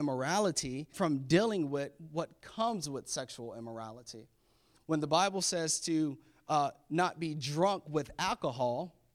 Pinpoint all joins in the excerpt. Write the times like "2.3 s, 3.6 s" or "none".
0.9 s